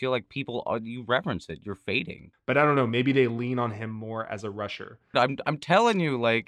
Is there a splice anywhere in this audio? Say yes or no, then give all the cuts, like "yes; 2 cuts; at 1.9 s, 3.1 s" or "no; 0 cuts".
yes; 2 cuts; at 2.3 s, 5.1 s